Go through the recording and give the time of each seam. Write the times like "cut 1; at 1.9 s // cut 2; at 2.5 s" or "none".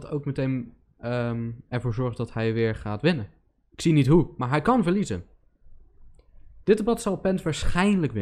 cut 1; at 3.7 s // cut 2; at 6.6 s